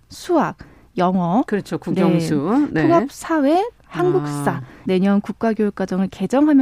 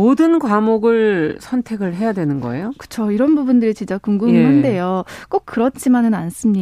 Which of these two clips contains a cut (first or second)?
first